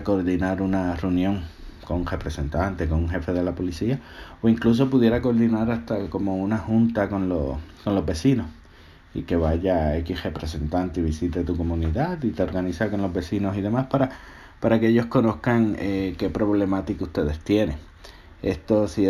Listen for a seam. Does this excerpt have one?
no; 0 cuts

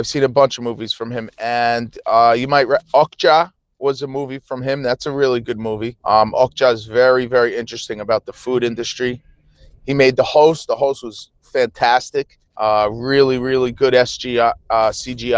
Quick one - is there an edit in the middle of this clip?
yes; 2 cuts; at 6.0 s, 12.5 s

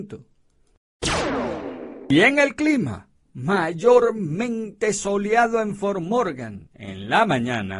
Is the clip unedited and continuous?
yes; 0 cuts

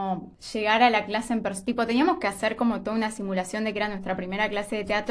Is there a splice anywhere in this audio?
no; 0 cuts

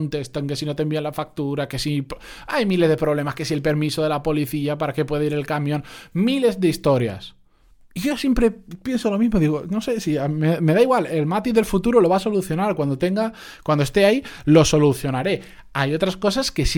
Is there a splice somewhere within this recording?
no; 0 cuts

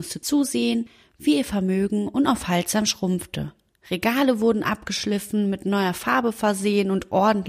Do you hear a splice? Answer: yes; 1 cut; at 3.8 s

